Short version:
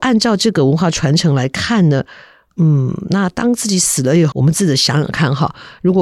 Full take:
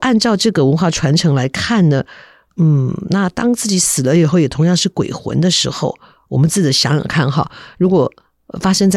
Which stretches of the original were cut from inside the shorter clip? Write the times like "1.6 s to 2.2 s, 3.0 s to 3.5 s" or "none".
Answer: 4.3 s to 6.3 s